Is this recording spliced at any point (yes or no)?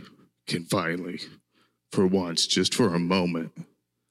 no